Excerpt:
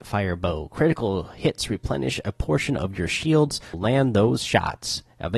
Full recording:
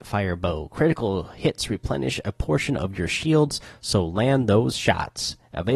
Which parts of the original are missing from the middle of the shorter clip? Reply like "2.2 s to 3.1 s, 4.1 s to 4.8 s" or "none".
3.7 s to 4.1 s